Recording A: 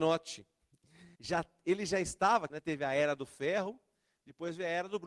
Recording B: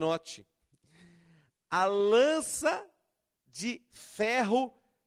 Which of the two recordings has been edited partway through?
A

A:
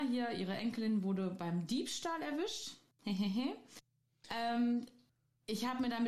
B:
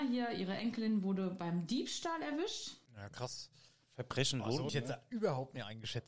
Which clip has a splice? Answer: B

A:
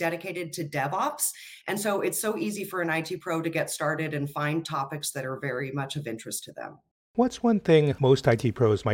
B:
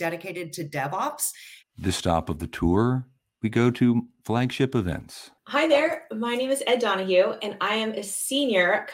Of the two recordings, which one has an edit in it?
B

